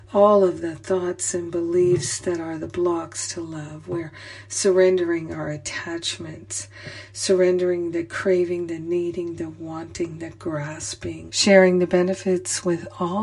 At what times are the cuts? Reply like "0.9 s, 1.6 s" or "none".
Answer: 11.3 s